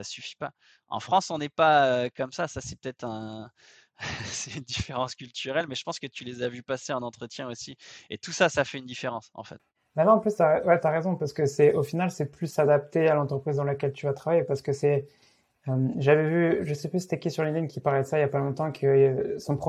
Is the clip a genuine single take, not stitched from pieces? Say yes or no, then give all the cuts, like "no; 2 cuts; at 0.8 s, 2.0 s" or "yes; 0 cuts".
yes; 0 cuts